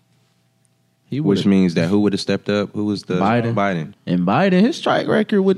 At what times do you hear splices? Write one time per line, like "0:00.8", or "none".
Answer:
0:03.9